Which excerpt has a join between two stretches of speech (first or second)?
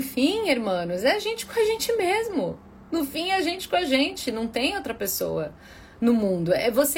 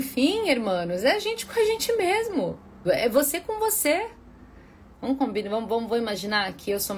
second